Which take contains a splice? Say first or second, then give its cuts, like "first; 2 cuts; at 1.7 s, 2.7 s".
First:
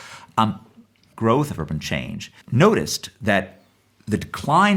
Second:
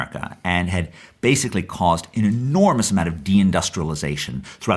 first; 2 cuts; at 1.1 s, 2.4 s